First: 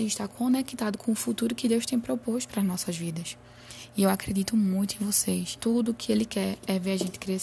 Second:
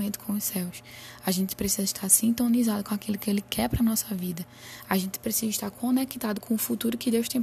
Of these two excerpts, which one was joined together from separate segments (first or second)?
first